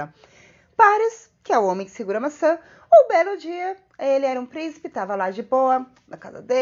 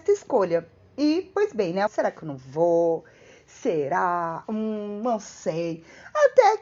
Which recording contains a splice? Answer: second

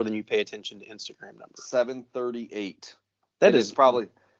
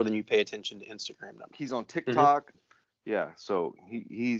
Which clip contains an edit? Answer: second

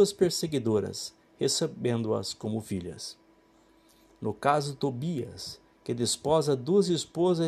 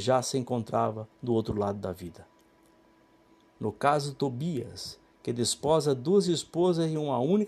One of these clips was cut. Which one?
second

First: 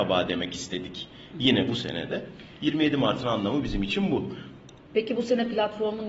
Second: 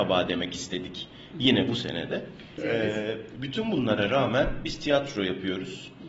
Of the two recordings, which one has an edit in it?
second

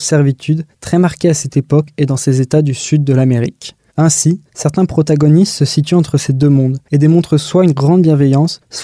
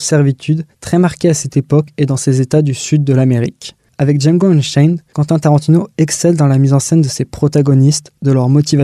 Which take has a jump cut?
second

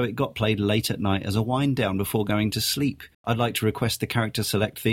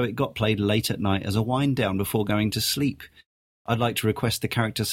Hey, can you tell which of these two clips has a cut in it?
first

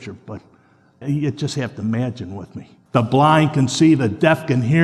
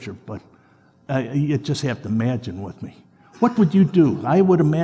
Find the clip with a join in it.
first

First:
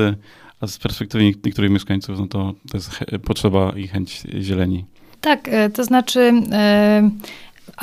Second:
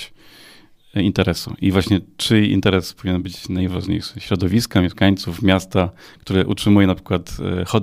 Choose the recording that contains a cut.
first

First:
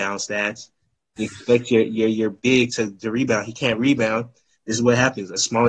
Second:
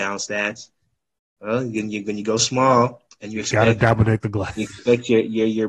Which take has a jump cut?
first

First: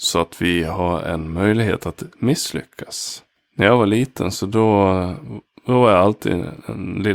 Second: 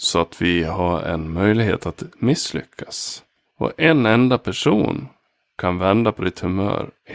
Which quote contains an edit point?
second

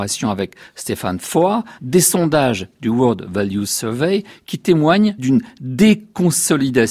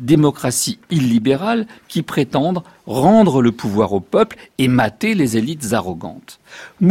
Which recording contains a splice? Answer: first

